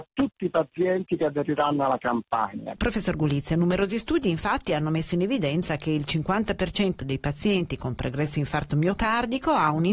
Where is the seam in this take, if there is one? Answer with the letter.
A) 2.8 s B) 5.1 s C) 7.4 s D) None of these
A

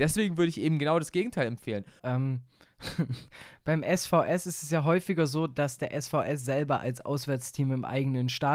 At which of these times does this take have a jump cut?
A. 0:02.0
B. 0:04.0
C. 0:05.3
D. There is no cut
A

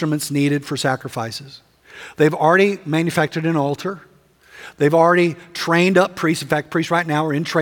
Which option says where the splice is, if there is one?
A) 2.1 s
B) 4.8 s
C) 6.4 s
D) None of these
D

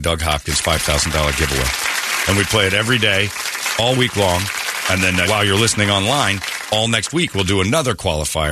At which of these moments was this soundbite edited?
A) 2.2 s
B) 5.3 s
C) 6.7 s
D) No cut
B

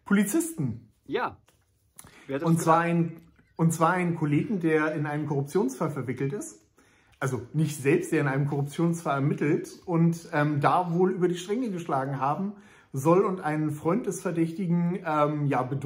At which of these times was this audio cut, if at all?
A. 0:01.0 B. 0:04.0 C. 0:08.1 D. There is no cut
D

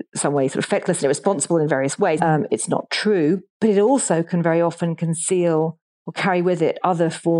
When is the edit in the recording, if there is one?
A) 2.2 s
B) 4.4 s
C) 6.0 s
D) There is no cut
A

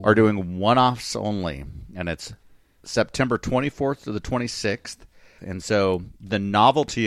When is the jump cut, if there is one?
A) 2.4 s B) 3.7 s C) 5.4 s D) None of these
C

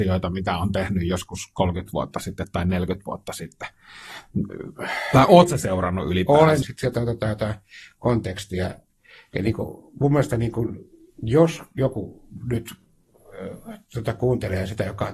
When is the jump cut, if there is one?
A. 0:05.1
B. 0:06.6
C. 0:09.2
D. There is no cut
B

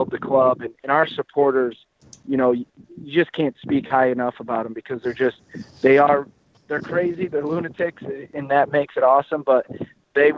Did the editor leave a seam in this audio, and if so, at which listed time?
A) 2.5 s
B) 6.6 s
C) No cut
C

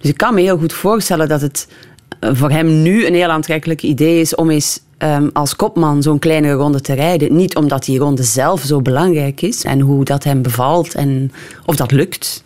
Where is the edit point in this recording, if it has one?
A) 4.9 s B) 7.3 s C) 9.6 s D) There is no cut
C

